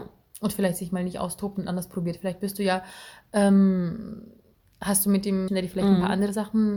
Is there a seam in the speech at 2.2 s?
no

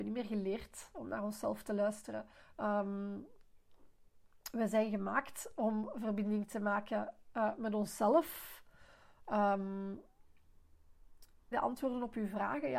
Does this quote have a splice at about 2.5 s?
yes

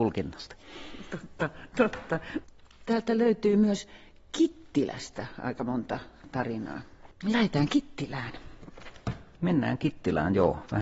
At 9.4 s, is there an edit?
no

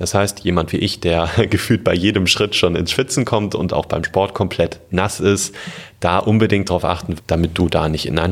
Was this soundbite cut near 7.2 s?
yes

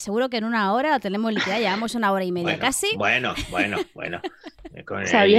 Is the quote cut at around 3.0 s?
no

